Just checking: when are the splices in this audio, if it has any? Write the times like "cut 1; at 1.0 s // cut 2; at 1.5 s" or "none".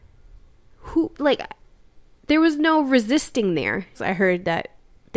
cut 1; at 1.1 s // cut 2; at 3.9 s